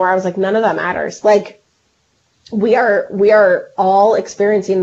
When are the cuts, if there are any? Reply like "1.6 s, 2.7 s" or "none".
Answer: none

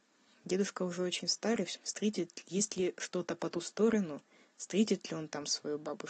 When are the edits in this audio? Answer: 1.8 s

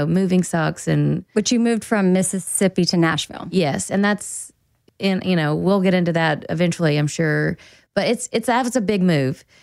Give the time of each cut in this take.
none

